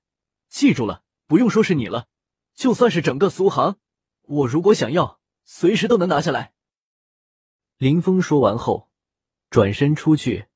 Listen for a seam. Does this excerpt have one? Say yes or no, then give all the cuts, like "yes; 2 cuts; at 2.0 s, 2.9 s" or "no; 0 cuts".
yes; 1 cut; at 1.1 s